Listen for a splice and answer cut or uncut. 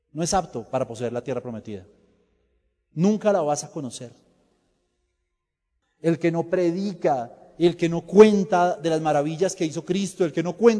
cut